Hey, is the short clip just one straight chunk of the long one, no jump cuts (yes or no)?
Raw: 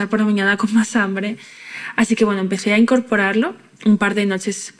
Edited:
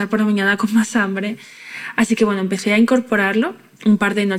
yes